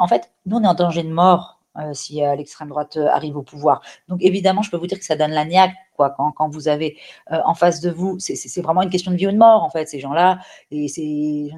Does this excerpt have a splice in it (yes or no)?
yes